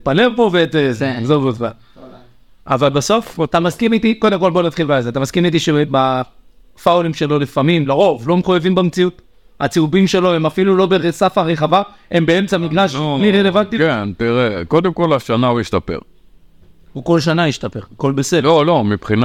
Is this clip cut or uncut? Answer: uncut